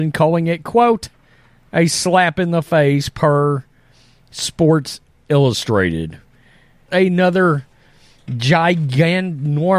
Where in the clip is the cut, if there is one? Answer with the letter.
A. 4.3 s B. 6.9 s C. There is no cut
B